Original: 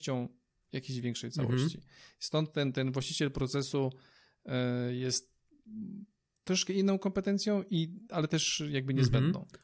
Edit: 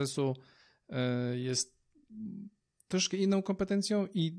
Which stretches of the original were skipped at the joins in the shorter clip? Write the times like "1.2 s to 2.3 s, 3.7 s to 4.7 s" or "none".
none